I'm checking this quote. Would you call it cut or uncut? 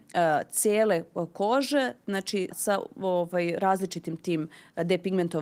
cut